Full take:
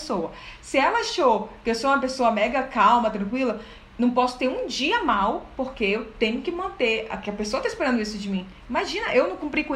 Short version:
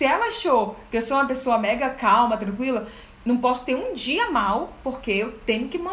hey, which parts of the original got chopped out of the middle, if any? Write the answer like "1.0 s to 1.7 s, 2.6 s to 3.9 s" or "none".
none